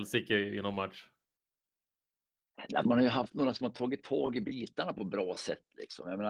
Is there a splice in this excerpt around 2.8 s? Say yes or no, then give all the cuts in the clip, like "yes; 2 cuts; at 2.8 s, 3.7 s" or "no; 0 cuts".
yes; 1 cut; at 2.8 s